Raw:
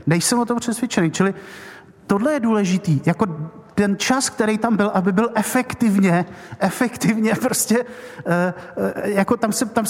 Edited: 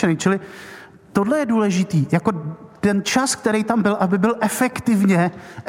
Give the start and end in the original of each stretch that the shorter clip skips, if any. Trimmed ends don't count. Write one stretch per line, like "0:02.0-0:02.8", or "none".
none

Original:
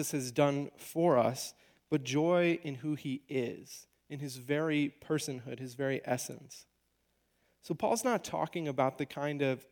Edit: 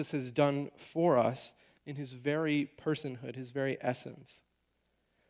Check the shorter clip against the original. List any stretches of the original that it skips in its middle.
0:01.8-0:04.0

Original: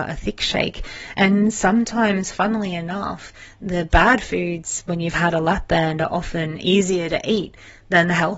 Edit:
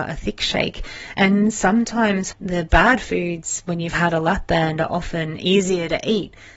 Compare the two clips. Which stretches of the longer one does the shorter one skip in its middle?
0:02.3-0:03.5

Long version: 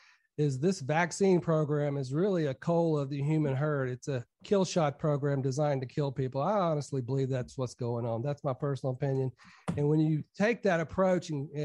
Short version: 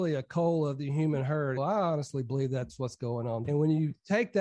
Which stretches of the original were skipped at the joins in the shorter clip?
0:03.9-0:06.3
0:08.2-0:09.7

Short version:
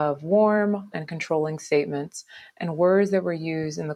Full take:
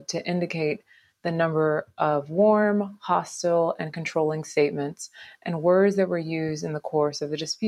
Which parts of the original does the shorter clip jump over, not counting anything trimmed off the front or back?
0:03.0-0:03.8

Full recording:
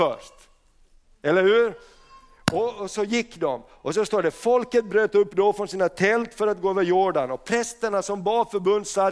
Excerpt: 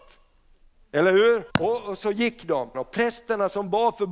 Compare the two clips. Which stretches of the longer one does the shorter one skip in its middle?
0:01.8-0:02.4
0:03.7-0:07.3

